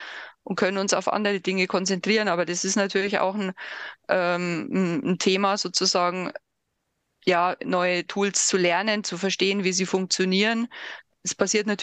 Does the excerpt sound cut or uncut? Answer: cut